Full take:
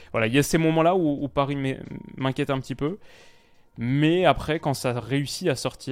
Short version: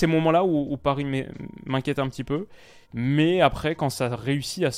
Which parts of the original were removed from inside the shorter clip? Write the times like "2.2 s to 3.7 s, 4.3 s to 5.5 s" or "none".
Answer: 3.3 s to 3.7 s

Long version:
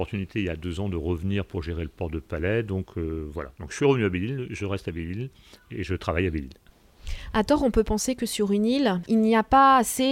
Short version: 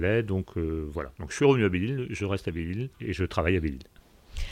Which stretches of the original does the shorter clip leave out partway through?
5.3 s to 5.6 s

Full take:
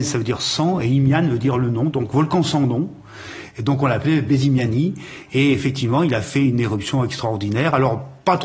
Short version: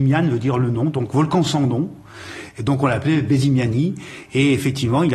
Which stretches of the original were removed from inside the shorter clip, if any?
none

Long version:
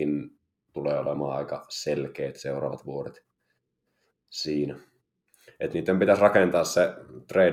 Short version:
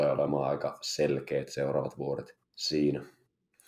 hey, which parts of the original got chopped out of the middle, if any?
3.3 s to 4.2 s

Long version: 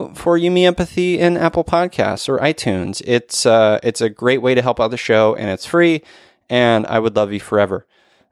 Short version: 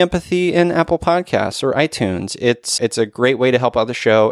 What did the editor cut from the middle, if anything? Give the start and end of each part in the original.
3.4 s to 3.8 s

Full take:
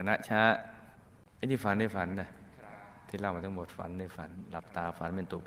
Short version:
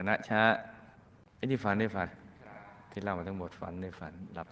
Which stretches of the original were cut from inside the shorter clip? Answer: 2.1 s to 2.2 s

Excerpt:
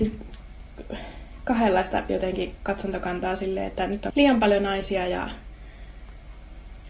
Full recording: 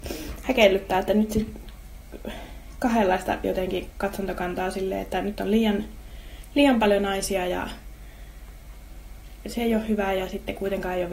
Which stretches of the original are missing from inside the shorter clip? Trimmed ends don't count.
5.4 s to 6.5 s

